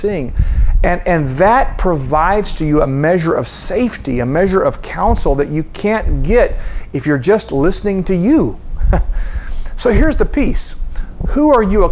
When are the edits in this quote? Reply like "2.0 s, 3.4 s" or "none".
none